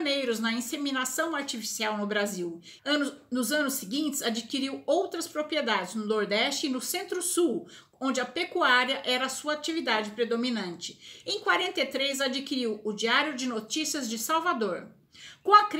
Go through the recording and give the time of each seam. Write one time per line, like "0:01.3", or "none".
0:02.8
0:11.2